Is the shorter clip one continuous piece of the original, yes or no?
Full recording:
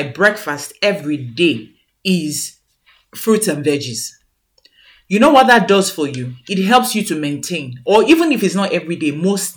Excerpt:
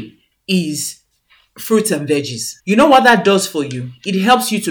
no